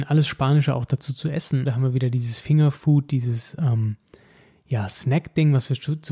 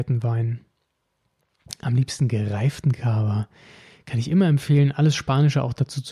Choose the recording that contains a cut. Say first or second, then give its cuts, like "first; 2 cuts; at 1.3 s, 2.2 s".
first; 1 cut; at 1.6 s